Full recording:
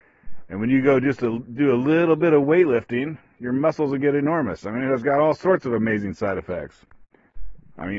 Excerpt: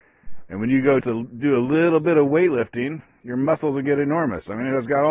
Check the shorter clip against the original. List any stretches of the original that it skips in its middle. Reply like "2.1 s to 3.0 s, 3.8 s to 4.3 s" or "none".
1.0 s to 1.2 s